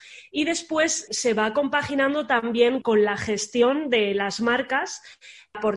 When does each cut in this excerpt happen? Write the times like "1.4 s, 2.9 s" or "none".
1.1 s, 2.8 s